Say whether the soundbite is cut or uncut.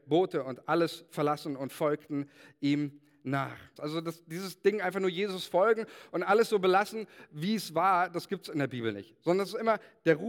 cut